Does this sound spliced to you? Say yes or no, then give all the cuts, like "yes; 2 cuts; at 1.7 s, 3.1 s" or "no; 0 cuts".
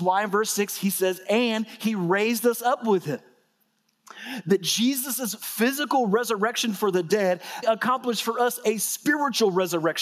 yes; 1 cut; at 7.6 s